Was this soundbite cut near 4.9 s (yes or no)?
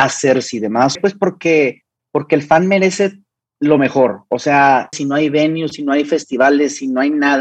yes